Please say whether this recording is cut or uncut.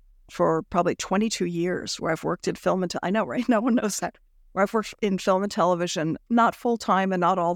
uncut